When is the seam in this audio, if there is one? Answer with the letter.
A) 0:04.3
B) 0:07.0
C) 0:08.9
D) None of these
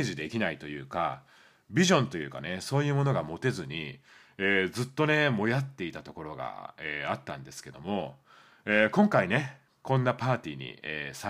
D